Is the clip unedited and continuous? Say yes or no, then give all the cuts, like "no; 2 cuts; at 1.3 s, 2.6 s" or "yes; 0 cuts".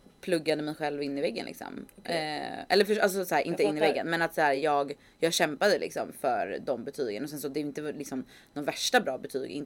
yes; 0 cuts